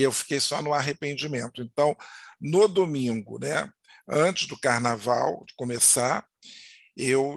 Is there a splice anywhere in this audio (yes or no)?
no